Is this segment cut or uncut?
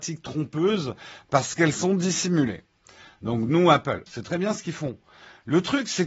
cut